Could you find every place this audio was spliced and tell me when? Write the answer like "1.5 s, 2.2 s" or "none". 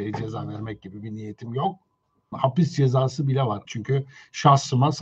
2.3 s, 3.7 s